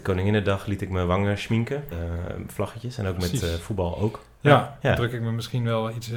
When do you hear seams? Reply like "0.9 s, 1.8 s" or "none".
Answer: 1.9 s, 4.8 s